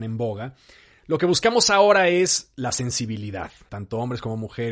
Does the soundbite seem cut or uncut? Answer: cut